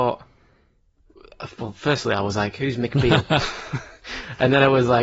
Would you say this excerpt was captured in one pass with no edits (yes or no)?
yes